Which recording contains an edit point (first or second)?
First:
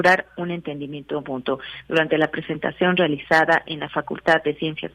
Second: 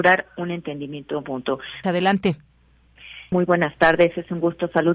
second